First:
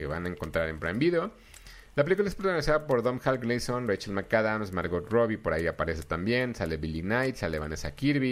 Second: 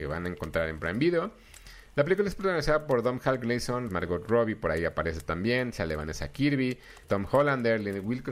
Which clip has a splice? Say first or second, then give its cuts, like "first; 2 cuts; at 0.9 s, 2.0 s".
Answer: second; 3 cuts; at 3.9 s, 5.7 s, 7.0 s